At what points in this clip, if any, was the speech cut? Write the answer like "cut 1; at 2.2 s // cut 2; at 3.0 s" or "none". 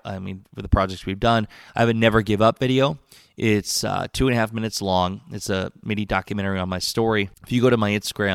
cut 1; at 7.3 s

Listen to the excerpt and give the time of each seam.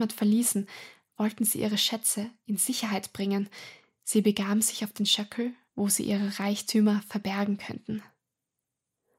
cut 1; at 5.7 s

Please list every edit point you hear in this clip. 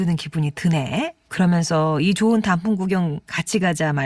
cut 1; at 1.3 s

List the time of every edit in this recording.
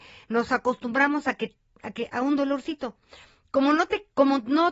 none

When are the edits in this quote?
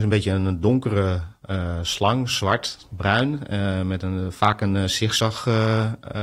none

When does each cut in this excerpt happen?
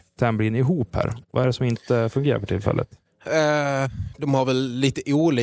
none

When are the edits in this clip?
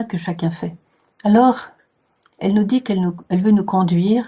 cut 1; at 1.2 s

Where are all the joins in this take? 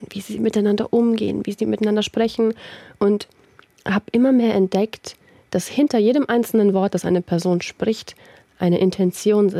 none

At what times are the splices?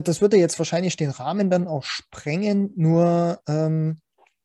none

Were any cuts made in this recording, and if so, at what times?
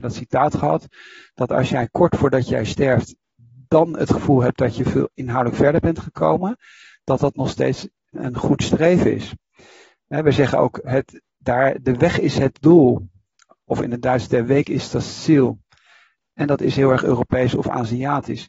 none

